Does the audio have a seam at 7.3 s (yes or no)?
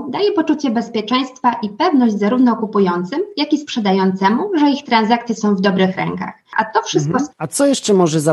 yes